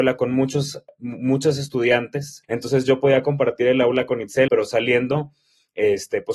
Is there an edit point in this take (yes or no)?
yes